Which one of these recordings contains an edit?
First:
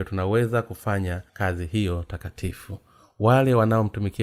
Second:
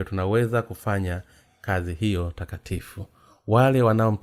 first; 1 cut; at 1.3 s

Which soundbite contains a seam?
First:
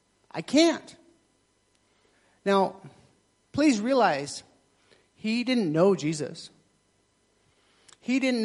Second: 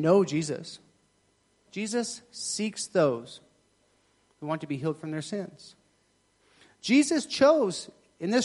second; 1 cut; at 1.7 s

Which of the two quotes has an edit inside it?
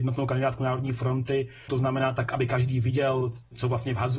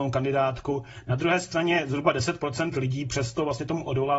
first; 1 cut; at 1.7 s

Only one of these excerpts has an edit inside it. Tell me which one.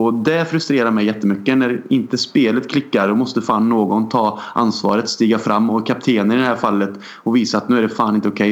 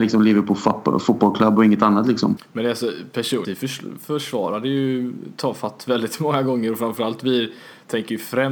second; 2 cuts; at 2.4 s, 3.4 s

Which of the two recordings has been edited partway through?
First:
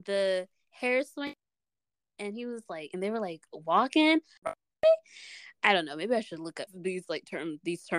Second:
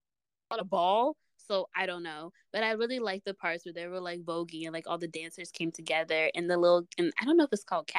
first; 2 cuts; at 4.4 s, 6.7 s

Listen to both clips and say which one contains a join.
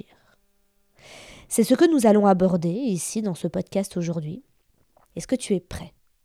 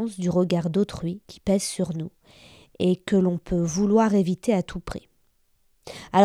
first; 1 cut; at 5.1 s

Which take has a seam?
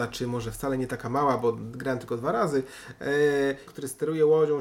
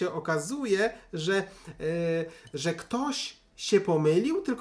first; 1 cut; at 3.7 s

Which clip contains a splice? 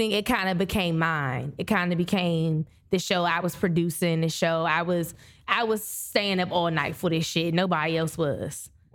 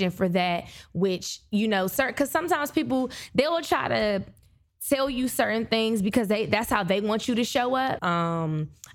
second; 1 cut; at 8.0 s

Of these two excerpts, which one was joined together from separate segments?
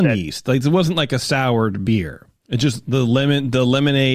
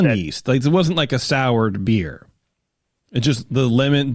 first; 1 cut; at 2.4 s

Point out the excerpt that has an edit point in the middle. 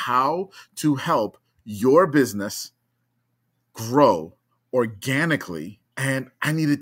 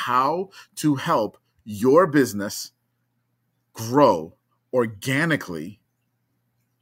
first; 1 cut; at 5.8 s

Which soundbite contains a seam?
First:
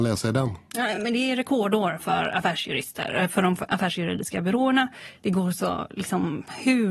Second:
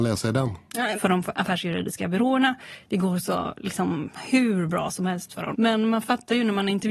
second; 2 cuts; at 1.0 s, 5.5 s

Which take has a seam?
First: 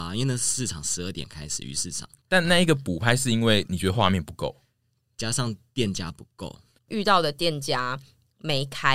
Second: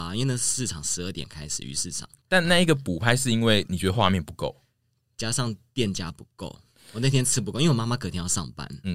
first; 1 cut; at 6.8 s

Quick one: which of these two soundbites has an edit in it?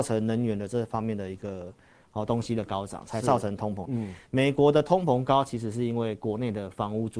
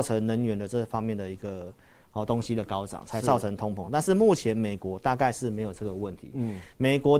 first; 1 cut; at 3.9 s

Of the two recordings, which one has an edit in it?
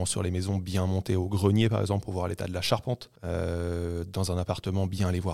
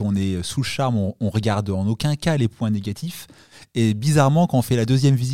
first; 1 cut; at 3.2 s

